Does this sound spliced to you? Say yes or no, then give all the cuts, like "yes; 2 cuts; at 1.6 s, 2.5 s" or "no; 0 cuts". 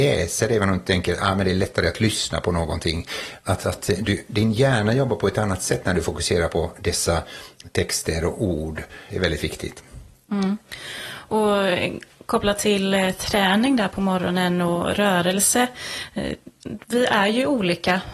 yes; 1 cut; at 9.1 s